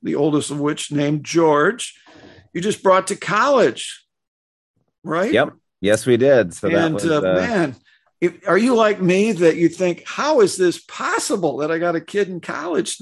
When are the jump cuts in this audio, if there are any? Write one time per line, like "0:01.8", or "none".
0:08.1